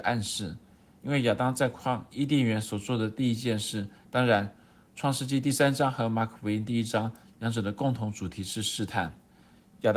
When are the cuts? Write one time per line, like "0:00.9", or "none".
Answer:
0:04.0

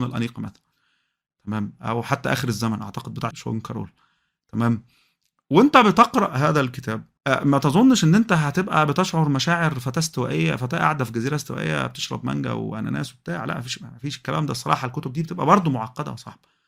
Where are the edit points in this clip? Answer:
0:03.3
0:07.2

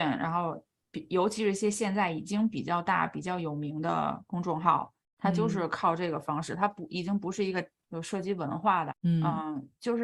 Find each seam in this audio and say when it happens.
0:07.8
0:08.9

